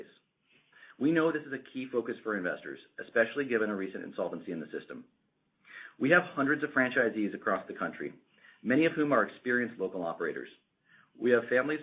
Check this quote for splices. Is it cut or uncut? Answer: uncut